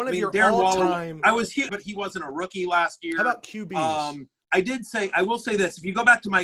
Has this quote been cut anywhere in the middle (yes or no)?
yes